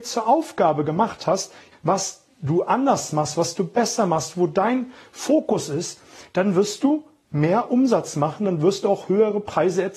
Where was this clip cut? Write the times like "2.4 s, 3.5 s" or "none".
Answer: 1.7 s